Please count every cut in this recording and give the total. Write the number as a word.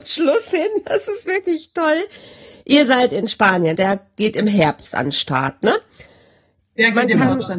one